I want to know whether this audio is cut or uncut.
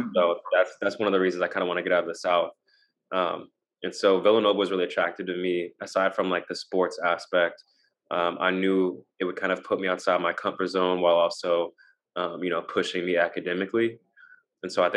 uncut